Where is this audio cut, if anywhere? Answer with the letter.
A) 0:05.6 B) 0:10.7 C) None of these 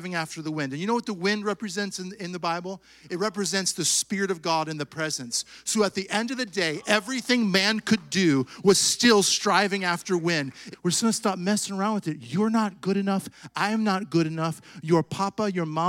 B